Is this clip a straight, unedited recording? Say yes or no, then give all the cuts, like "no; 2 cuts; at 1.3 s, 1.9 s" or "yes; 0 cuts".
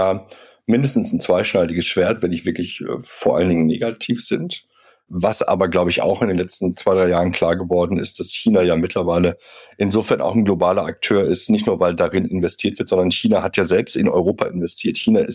yes; 0 cuts